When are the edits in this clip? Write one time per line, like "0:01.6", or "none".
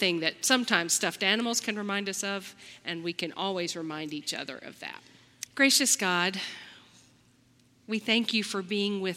0:05.5

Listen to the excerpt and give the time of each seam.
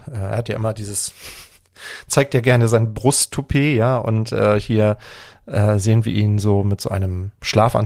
none

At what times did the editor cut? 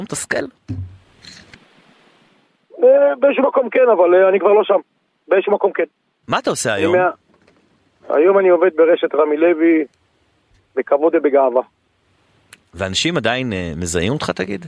none

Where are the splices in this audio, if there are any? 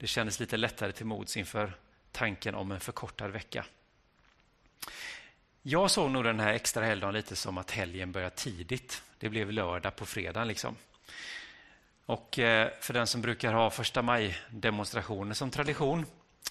none

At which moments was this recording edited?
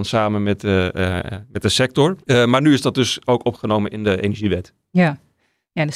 0:02.2

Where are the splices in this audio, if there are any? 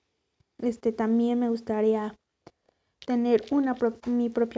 none

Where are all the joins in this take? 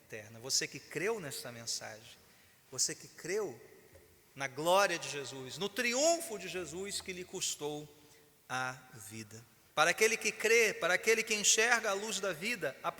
0:09.7

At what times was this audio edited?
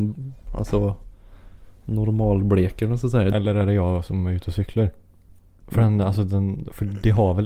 0:03.3
0:05.6

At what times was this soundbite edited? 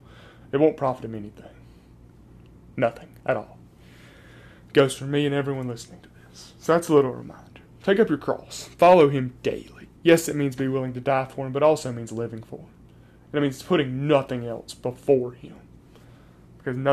0:10.0

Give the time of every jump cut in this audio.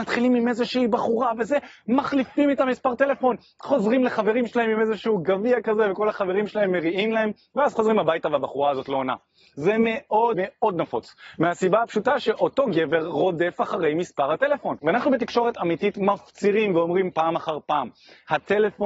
0:10.3

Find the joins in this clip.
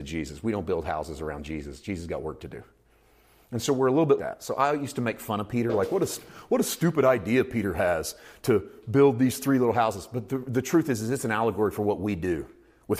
0:04.2

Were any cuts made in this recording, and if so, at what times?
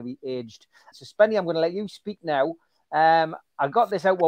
0:00.9

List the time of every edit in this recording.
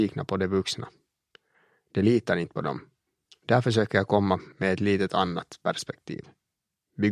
none

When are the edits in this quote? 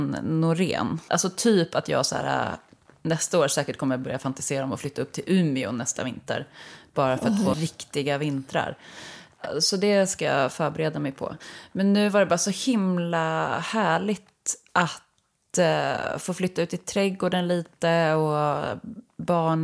0:01.1
0:07.5

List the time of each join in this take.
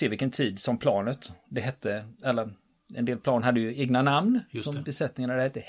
none

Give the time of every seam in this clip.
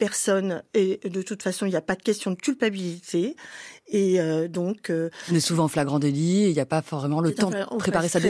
none

